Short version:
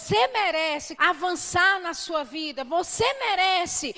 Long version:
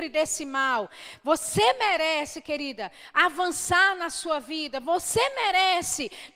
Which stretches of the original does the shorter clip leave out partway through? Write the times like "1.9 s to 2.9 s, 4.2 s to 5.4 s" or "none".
2.4 s to 3.1 s

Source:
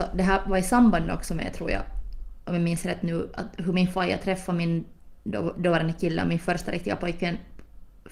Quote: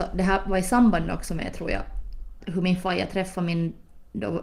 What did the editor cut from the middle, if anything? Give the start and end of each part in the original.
2.4 s to 3.5 s

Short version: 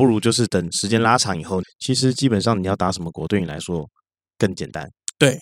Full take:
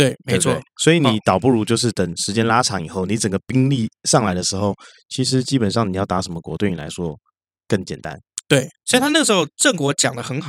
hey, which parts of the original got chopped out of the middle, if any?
3.1 s to 4.9 s

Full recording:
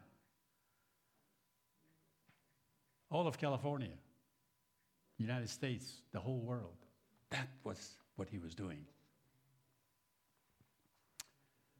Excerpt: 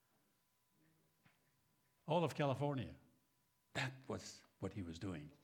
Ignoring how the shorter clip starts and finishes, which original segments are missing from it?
4.7 s to 7.3 s

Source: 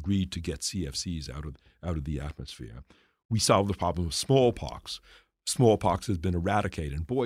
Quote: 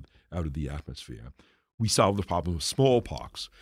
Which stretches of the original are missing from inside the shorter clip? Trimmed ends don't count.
none

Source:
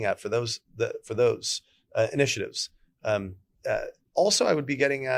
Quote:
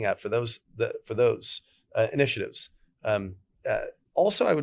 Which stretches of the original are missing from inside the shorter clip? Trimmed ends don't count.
none

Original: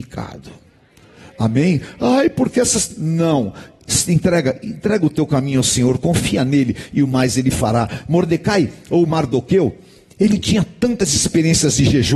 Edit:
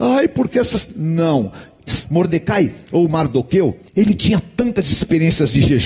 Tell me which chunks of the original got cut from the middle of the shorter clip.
4.1 s to 8.0 s, 9.9 s to 10.1 s

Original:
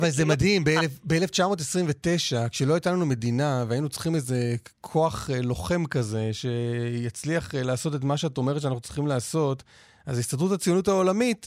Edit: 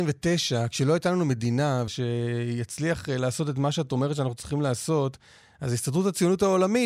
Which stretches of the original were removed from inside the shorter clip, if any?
3.7 s to 6.3 s

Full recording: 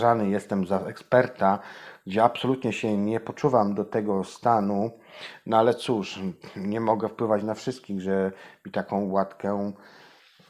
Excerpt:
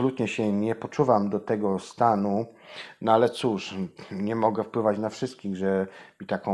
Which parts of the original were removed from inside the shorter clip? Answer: none

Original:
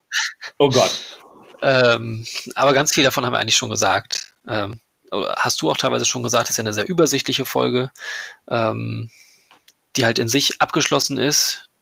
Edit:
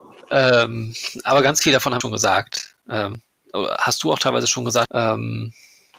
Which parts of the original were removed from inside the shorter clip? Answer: 3.3 s to 3.6 s, 6.4 s to 8.4 s

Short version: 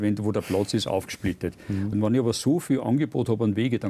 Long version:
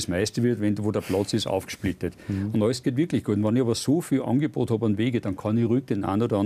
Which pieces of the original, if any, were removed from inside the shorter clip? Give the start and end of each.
2.5 s to 3.3 s

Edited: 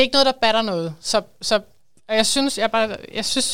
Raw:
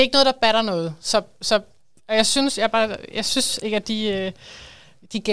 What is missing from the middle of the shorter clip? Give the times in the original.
none

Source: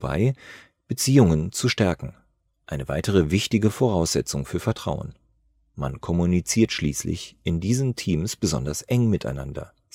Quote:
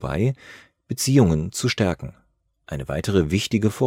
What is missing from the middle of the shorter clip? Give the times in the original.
none

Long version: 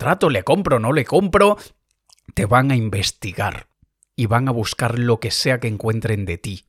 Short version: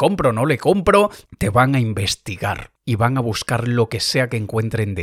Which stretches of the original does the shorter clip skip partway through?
1.7 s to 2.2 s, 3.7 s to 4.1 s

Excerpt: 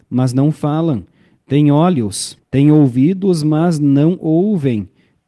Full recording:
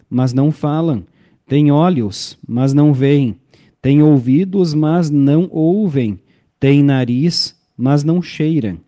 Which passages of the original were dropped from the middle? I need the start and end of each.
2.4 s to 3.7 s

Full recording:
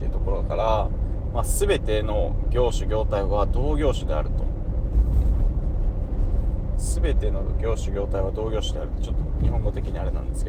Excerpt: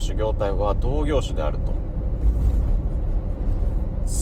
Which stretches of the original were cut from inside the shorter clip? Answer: none

